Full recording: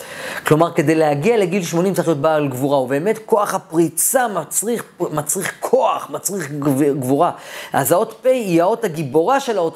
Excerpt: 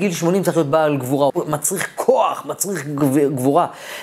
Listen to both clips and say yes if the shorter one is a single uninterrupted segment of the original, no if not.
no